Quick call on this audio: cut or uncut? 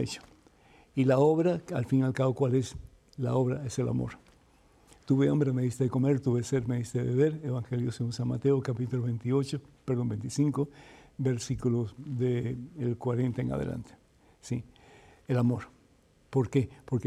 uncut